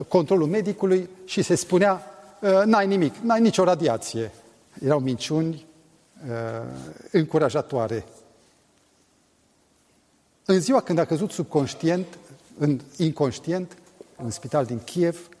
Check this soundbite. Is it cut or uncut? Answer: cut